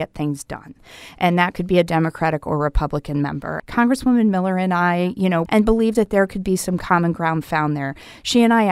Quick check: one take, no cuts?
no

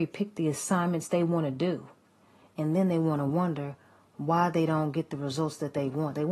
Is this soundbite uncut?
yes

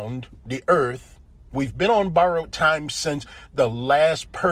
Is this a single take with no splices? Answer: no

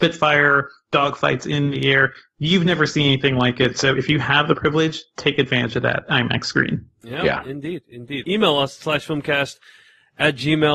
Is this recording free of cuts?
no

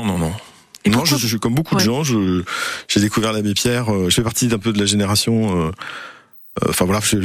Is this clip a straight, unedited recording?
yes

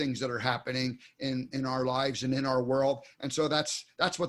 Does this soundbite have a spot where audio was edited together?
no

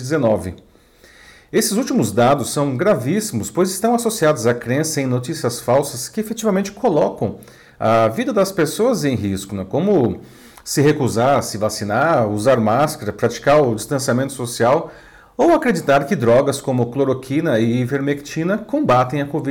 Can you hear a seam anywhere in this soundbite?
no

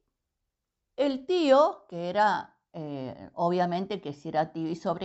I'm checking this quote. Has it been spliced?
no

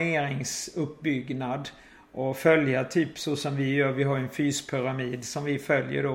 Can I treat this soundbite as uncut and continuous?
yes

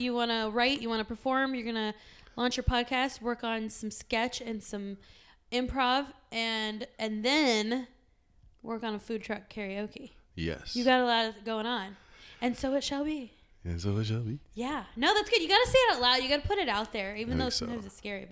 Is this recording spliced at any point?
no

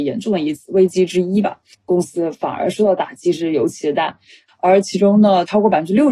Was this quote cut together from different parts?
yes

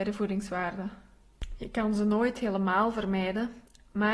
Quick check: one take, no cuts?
yes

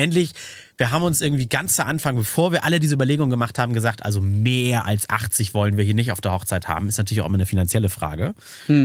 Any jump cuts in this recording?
no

